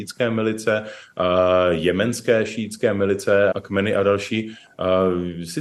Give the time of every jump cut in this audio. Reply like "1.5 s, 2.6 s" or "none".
3.5 s